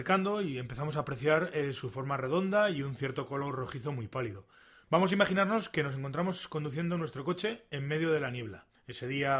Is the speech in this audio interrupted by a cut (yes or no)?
yes